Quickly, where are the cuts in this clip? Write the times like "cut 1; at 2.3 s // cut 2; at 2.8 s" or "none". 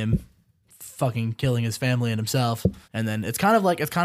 cut 1; at 2.8 s